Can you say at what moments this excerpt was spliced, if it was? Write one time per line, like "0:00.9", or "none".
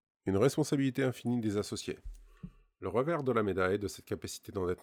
none